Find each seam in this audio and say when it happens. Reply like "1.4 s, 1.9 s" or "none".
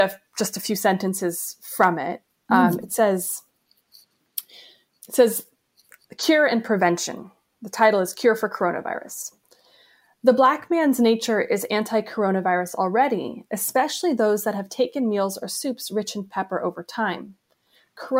5.0 s